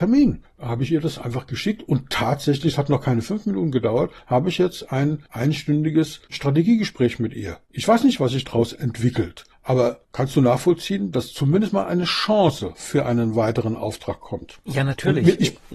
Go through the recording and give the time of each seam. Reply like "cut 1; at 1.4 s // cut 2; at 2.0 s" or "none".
cut 1; at 11.1 s